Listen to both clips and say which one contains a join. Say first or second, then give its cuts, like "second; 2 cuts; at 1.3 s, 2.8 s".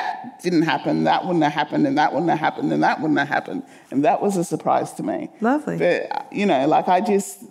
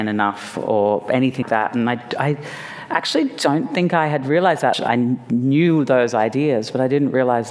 second; 2 cuts; at 1.4 s, 4.7 s